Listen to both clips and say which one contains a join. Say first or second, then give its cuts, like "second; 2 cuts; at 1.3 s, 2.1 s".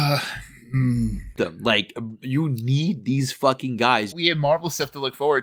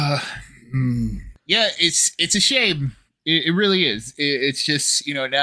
first; 2 cuts; at 1.4 s, 4.1 s